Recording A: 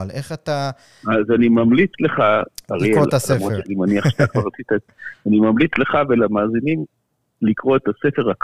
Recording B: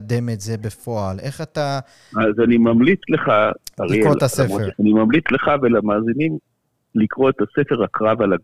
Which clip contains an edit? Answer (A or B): B